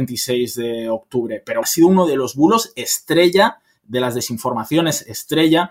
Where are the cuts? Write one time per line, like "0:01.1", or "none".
0:01.6